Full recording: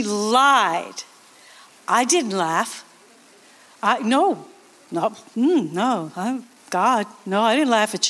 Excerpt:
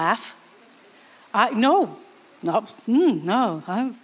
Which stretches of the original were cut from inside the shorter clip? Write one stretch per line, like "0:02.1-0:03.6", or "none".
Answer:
none